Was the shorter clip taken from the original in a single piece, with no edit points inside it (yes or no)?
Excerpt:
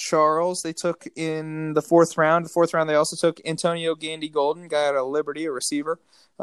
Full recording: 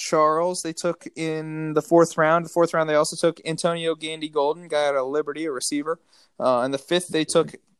yes